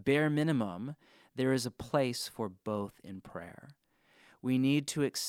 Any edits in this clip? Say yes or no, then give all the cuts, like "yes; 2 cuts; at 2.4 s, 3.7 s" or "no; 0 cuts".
no; 0 cuts